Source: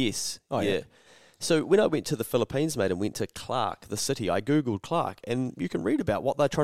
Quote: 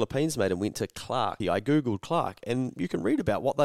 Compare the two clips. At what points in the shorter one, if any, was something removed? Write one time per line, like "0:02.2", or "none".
0:01.4